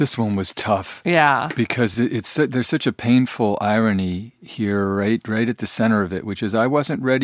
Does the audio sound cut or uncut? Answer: uncut